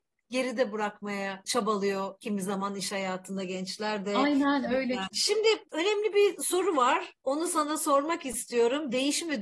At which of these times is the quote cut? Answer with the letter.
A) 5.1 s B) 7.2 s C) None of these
A